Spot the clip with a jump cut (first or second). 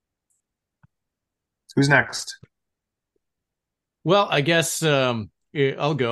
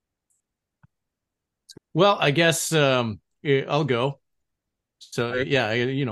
second